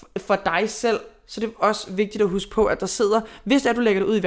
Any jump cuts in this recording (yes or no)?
no